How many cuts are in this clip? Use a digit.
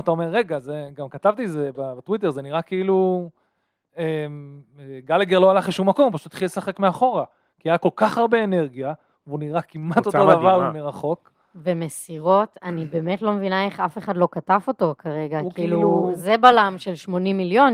0